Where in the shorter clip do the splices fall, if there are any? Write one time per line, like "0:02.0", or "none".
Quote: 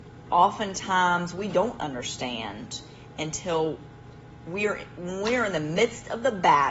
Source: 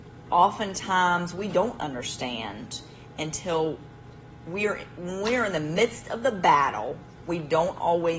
none

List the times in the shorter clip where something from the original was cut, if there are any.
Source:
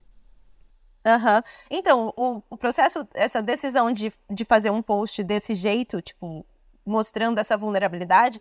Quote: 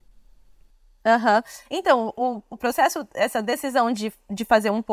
none

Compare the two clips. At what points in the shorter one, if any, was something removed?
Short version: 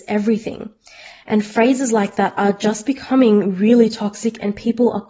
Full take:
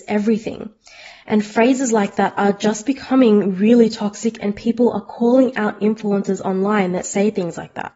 none

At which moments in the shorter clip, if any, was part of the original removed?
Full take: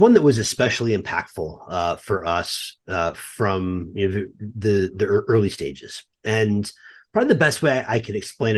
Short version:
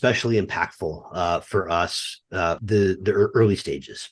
0:02.6

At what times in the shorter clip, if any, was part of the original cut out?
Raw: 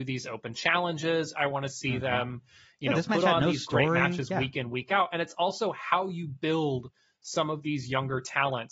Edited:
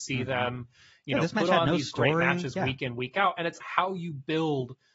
0:03.6

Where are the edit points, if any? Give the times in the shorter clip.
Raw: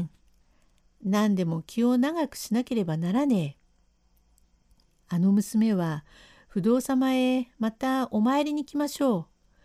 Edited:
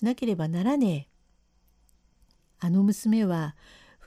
none

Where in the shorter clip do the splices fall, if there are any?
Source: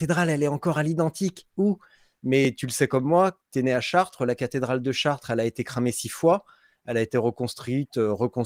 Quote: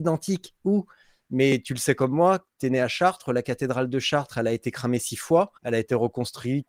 0:05.6

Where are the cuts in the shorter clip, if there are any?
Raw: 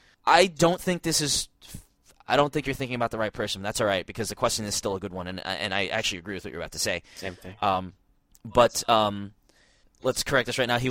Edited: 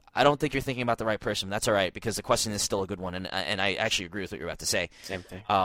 none

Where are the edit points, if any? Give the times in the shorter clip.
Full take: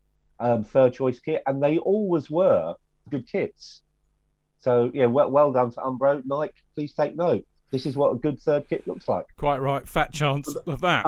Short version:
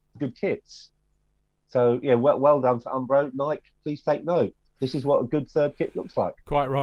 none

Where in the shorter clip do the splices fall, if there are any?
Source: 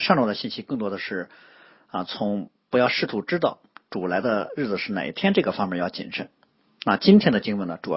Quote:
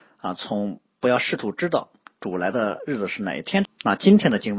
0:03.6

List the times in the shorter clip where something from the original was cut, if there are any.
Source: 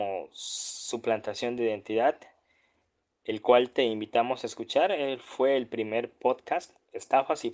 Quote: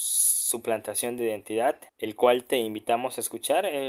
0:01.9

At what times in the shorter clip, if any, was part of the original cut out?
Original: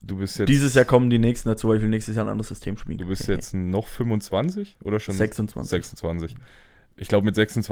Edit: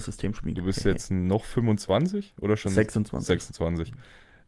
none

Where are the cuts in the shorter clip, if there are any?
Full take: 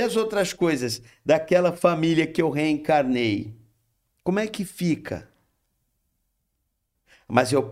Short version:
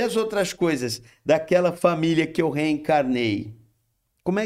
none

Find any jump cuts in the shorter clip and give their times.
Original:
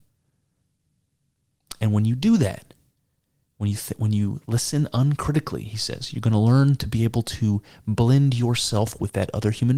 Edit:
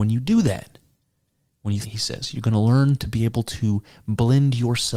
0:01.8

